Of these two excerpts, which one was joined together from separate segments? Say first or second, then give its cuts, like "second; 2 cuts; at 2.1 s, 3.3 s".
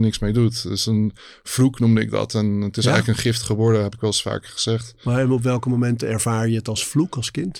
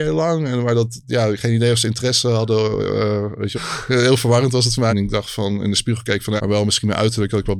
second; 3 cuts; at 3.5 s, 4.9 s, 6.4 s